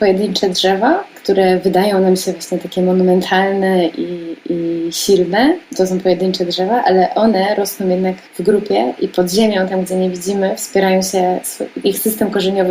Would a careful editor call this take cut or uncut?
cut